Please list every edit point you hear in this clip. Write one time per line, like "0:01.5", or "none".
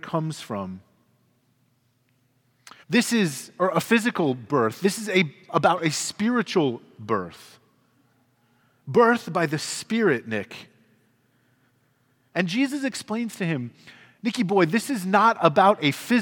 0:02.8
0:12.3